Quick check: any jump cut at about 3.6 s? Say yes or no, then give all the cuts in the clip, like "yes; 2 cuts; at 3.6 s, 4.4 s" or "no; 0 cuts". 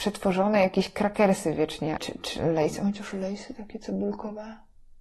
no; 1 cut; at 2.0 s